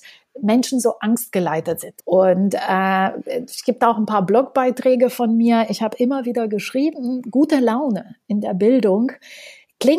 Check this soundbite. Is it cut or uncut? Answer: cut